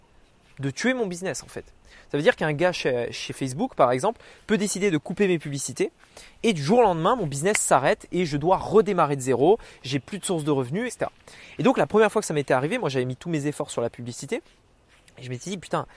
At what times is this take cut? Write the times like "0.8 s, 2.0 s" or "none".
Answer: 10.9 s